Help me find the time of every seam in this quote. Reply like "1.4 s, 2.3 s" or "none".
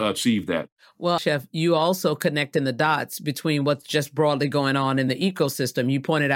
1.2 s